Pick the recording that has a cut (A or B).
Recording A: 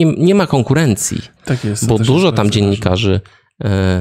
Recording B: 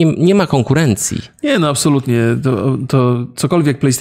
A